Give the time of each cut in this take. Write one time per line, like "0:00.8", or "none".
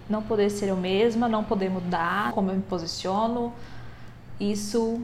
0:02.3